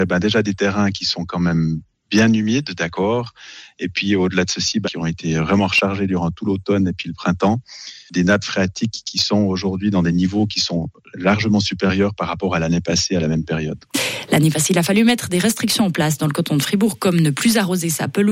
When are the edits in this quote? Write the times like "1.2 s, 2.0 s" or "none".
4.8 s